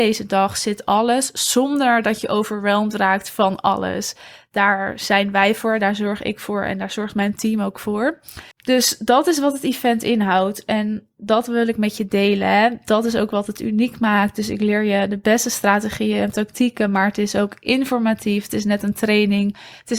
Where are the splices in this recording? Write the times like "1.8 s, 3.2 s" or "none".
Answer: 8.5 s